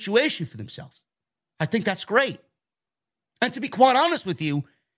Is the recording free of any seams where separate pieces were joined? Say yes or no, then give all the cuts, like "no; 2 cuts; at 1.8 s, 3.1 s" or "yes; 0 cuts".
yes; 0 cuts